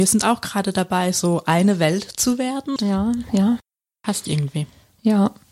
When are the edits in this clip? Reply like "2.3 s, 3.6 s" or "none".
2.8 s

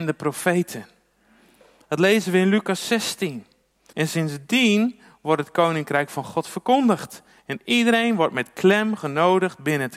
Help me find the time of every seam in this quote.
3.9 s

